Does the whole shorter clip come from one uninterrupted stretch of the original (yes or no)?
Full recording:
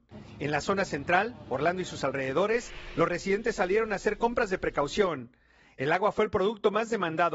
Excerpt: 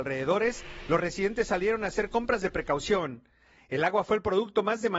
yes